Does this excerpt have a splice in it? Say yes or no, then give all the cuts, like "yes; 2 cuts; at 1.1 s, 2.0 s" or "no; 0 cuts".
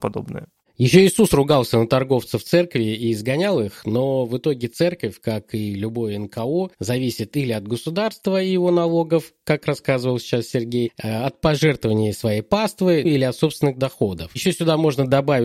yes; 1 cut; at 13.0 s